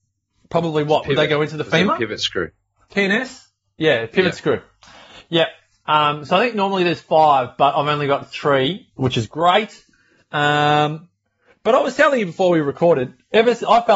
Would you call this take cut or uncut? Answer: cut